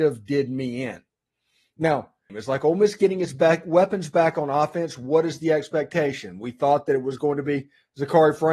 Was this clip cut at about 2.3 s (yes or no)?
yes